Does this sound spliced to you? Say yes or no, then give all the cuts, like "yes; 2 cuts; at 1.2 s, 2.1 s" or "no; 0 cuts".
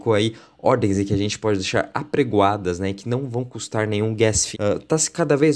yes; 1 cut; at 4.5 s